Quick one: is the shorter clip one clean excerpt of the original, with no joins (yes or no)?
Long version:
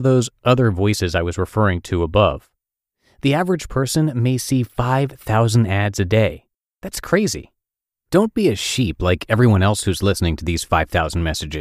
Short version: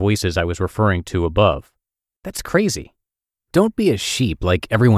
no